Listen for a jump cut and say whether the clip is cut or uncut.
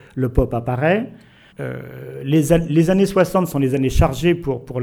cut